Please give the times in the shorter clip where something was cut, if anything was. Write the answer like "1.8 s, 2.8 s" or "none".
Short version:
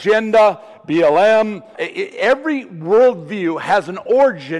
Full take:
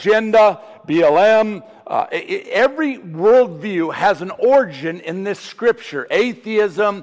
1.7 s